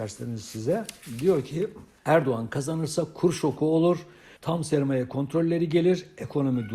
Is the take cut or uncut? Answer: cut